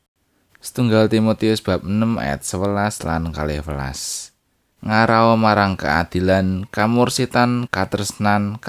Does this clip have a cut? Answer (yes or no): yes